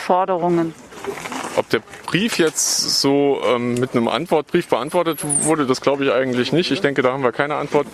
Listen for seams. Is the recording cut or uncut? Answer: uncut